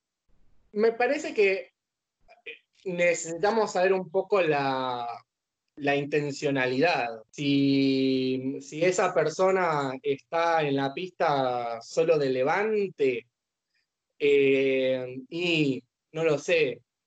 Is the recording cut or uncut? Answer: cut